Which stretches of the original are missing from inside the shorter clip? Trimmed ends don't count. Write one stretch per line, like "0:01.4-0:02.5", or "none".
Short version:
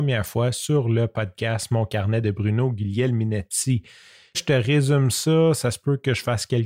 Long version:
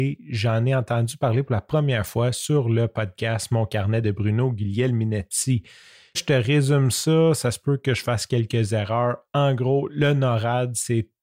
none